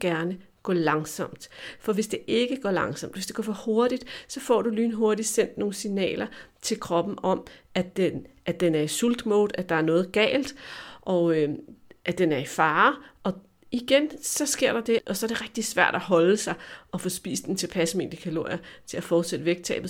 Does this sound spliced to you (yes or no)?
yes